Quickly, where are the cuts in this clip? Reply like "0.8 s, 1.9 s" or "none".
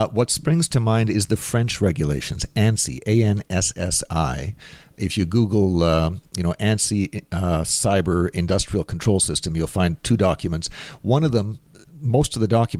none